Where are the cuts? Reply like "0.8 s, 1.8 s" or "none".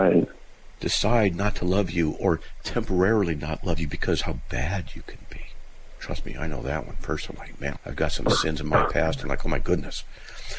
7.8 s